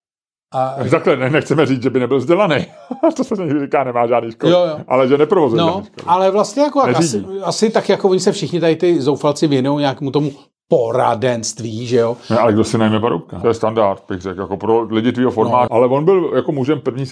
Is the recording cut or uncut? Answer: cut